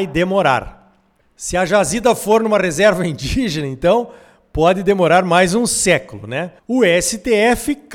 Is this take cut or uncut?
cut